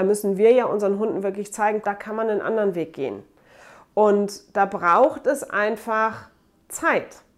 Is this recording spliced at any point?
yes; 1 cut; at 1.8 s

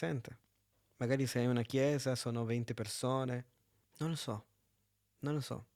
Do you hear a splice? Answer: no; 0 cuts

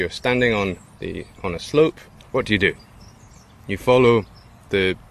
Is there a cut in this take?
yes; 1 cut; at 2.2 s

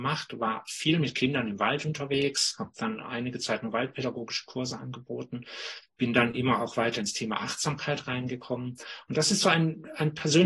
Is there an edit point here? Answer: no; 0 cuts

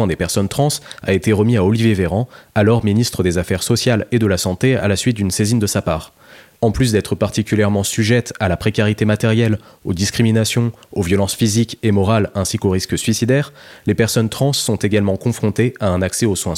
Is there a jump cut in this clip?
yes; 1 cut; at 6.6 s

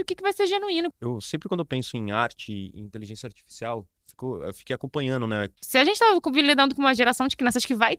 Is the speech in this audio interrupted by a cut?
yes; 2 cuts; at 0.9 s, 5.6 s

